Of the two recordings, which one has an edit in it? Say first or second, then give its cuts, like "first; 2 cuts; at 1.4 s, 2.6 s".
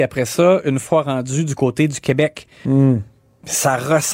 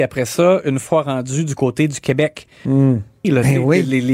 second; 1 cut; at 3.2 s